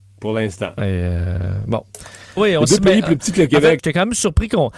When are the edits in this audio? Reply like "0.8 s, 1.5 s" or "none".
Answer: 2.4 s, 3.8 s